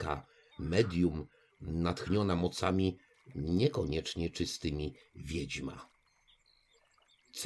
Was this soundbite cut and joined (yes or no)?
no